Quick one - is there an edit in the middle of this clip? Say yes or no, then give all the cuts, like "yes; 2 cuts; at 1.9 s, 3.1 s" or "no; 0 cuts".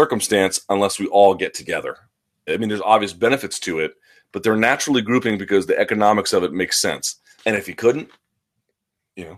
yes; 2 cuts; at 2.5 s, 7.4 s